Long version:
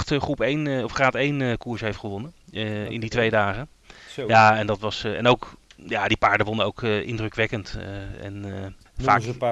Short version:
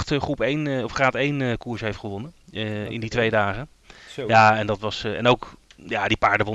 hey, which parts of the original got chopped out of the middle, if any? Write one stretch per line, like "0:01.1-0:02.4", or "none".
none